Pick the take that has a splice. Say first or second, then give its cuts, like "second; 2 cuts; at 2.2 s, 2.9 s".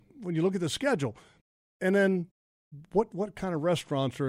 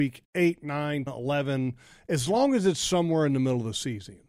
second; 1 cut; at 1.1 s